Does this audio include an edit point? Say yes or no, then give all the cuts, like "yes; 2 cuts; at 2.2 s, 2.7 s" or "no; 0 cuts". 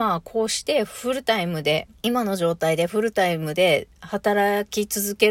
yes; 1 cut; at 2.0 s